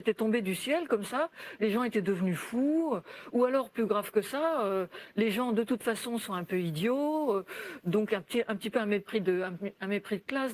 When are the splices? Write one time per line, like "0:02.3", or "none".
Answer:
none